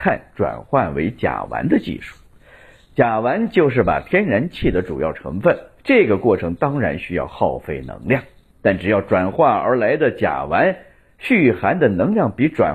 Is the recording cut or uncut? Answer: uncut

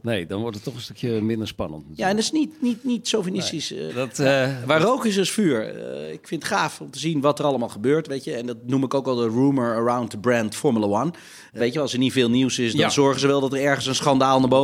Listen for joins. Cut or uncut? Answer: cut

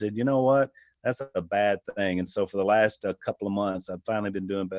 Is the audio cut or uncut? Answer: uncut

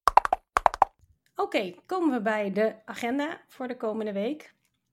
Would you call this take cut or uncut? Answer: uncut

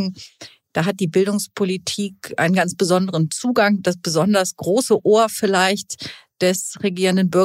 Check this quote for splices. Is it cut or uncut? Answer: uncut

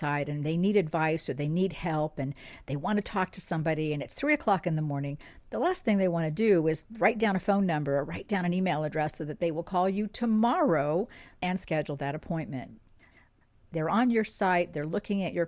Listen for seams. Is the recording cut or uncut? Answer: cut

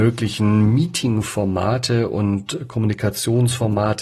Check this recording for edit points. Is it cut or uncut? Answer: uncut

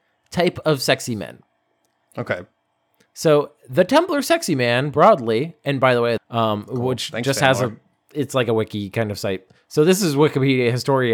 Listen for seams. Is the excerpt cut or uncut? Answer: cut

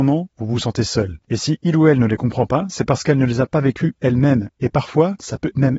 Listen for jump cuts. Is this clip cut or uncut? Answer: cut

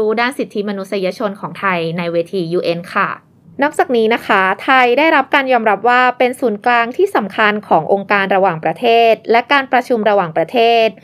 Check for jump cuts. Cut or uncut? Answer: uncut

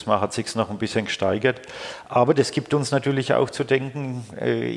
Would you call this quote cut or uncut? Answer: uncut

